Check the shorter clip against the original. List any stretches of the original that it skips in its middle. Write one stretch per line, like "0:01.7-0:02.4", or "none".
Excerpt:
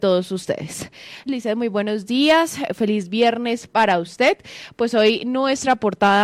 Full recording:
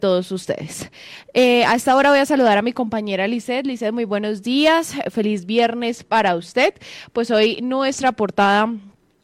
0:01.3-0:03.6